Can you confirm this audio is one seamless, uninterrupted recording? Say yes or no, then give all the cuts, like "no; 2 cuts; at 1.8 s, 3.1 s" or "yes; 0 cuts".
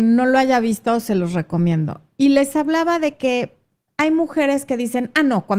yes; 0 cuts